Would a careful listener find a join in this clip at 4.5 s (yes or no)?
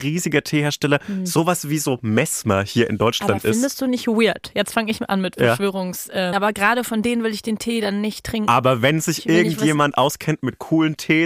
no